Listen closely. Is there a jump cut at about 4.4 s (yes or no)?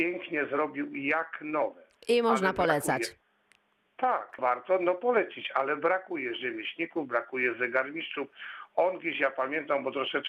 yes